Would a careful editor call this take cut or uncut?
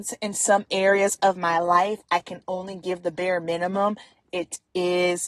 uncut